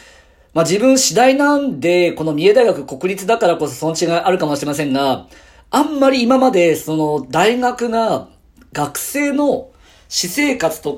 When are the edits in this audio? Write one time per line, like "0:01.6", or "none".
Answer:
none